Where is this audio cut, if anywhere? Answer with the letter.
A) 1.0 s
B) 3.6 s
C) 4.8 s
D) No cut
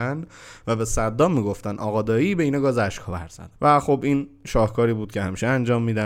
B